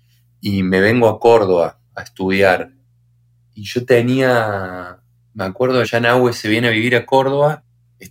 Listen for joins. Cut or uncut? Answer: cut